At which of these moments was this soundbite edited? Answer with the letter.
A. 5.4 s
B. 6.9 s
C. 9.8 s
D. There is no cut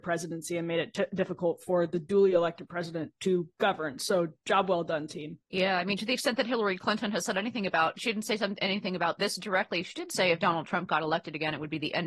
A